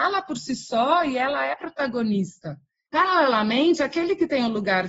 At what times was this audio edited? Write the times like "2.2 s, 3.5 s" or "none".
2.9 s